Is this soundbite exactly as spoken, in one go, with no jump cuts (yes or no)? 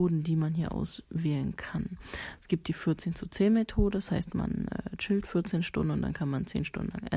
yes